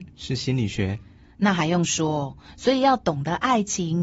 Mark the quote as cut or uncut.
uncut